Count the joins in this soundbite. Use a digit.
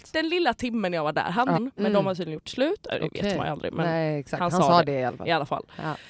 1